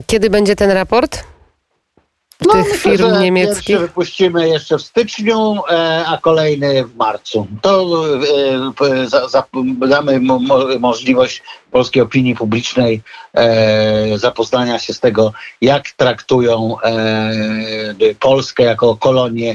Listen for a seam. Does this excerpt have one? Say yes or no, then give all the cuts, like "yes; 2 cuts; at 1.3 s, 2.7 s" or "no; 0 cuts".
no; 0 cuts